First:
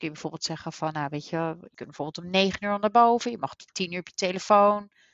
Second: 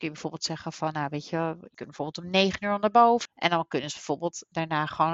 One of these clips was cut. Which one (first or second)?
second